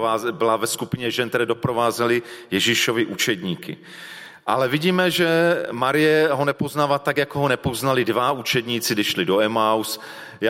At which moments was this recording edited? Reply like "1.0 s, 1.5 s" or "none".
none